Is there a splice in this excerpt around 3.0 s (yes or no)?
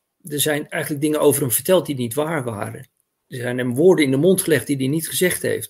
no